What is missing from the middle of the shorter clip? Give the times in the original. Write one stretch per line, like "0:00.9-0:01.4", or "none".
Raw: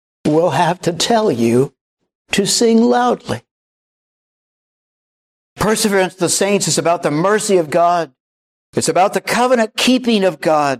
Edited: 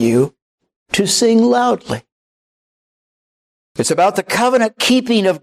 0:05.0-0:08.6